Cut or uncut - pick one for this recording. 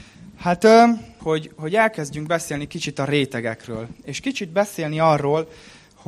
cut